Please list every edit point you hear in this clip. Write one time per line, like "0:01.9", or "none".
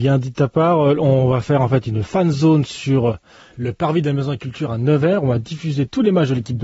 none